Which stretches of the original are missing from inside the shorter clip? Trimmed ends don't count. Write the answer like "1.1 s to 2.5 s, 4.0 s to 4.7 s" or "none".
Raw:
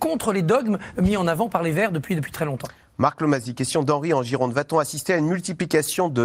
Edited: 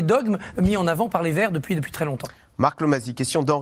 none